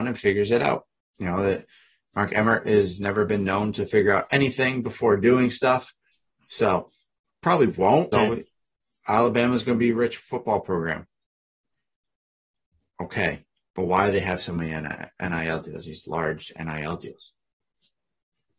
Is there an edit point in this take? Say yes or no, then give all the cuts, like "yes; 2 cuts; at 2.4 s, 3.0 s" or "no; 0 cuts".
yes; 1 cut; at 8.1 s